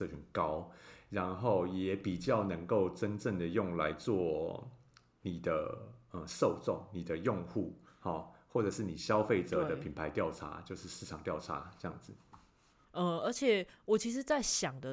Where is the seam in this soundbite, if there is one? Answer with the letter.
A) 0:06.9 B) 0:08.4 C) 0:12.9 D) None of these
C